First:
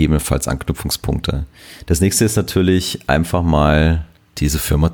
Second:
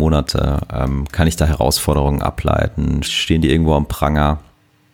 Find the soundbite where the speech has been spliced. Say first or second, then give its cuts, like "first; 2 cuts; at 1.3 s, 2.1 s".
second; 1 cut; at 3.0 s